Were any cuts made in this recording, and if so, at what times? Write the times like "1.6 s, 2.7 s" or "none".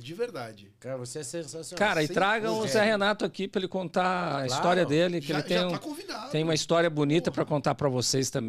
none